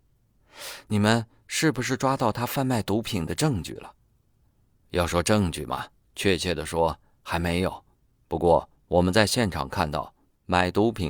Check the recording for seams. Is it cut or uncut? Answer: uncut